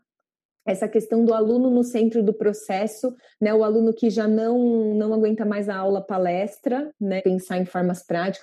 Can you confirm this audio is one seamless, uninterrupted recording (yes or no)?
no